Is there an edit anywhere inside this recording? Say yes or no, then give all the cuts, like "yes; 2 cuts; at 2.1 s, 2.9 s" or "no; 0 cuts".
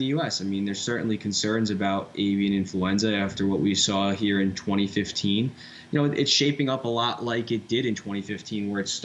no; 0 cuts